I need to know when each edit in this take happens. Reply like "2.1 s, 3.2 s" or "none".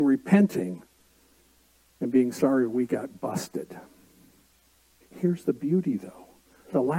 5.0 s